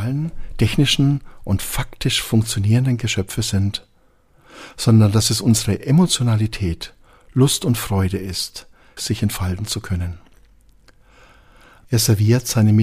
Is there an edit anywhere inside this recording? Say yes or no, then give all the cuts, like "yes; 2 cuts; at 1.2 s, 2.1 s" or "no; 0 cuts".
yes; 2 cuts; at 9.0 s, 11.8 s